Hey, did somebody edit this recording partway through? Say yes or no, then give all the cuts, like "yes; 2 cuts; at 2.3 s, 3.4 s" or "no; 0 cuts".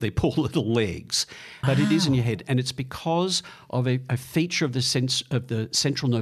yes; 1 cut; at 1.6 s